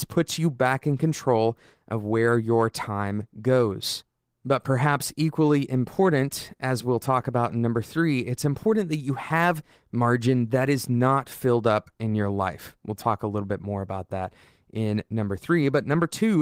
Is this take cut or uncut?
uncut